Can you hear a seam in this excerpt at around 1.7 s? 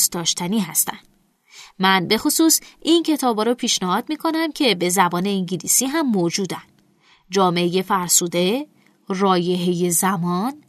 no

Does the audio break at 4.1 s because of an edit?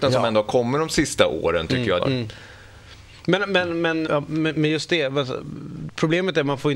yes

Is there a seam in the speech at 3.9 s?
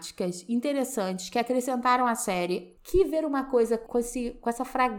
yes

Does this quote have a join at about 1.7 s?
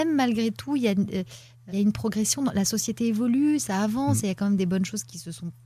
yes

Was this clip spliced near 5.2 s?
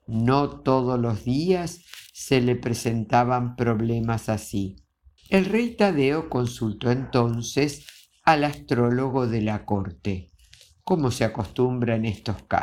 yes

